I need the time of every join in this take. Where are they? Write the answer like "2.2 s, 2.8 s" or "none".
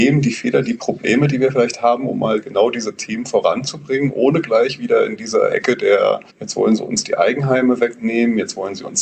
6.3 s